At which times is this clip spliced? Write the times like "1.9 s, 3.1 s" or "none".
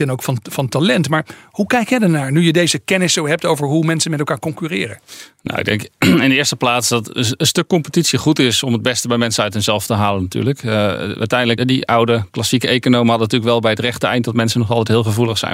11.6 s